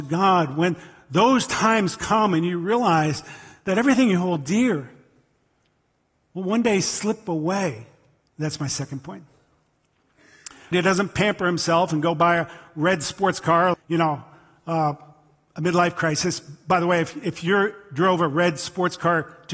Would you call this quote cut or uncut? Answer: cut